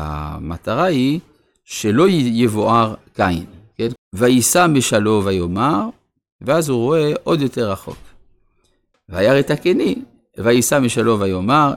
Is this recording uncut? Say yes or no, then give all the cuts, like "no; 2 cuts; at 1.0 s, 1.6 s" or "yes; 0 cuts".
no; 2 cuts; at 4.0 s, 8.9 s